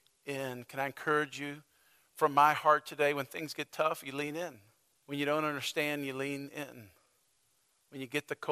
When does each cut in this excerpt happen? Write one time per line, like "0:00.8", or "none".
0:05.0